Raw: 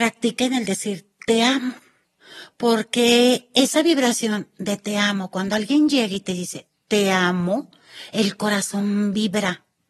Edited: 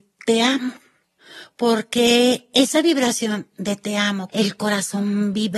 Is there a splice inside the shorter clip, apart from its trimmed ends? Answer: yes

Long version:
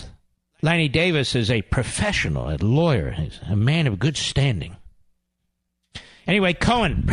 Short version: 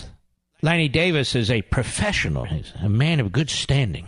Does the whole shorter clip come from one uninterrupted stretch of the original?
no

